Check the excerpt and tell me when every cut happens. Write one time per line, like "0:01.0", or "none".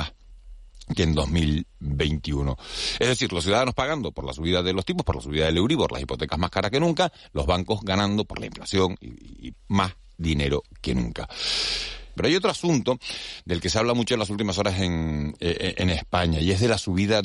0:09.5
0:12.2